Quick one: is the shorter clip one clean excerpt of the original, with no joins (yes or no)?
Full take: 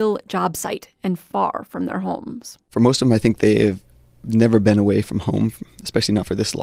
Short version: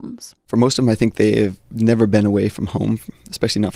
no